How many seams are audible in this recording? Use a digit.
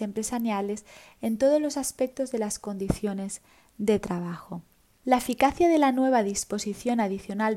0